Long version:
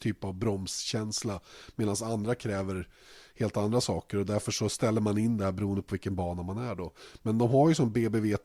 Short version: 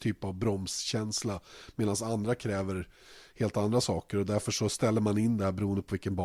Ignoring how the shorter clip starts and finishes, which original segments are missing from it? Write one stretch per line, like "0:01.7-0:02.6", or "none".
none